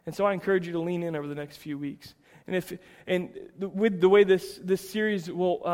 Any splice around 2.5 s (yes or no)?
no